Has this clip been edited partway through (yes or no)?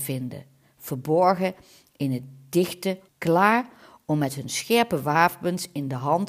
yes